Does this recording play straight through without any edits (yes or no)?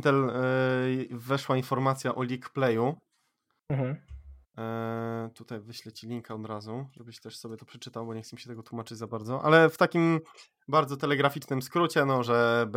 yes